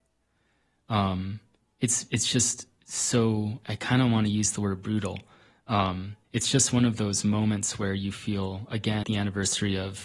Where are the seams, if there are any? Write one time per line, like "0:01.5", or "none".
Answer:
0:03.6
0:06.2
0:09.0